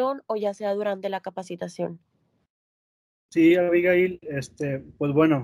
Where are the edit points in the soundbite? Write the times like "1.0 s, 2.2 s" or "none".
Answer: none